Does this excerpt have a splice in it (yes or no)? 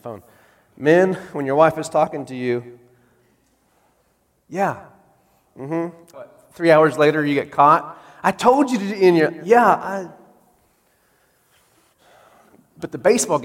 yes